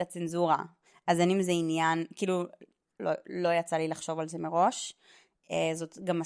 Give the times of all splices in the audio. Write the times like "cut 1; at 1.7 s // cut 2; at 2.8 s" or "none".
cut 1; at 3.0 s